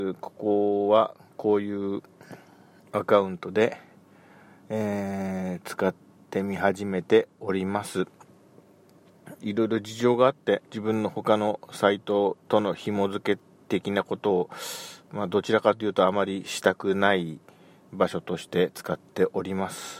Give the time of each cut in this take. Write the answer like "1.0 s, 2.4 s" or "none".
9.4 s, 10.6 s, 12.4 s